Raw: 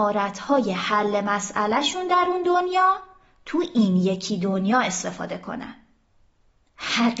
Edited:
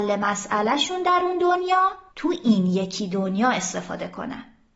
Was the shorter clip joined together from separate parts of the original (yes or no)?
yes